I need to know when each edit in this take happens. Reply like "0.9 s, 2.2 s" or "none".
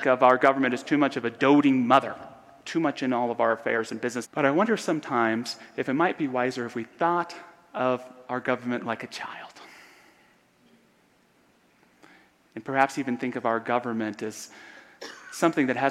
4.2 s

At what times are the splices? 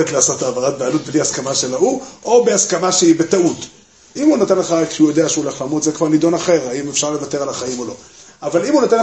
4.1 s

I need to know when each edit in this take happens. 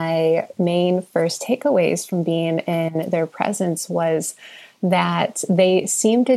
none

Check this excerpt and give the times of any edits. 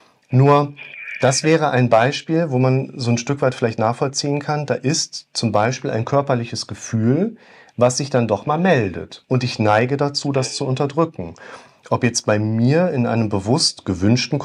none

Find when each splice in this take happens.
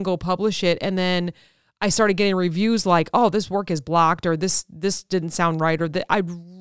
none

